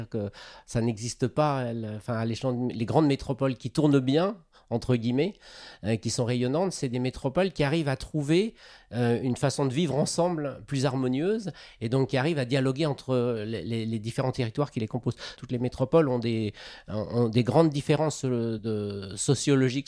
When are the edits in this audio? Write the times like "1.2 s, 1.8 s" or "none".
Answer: 15.4 s, 18.6 s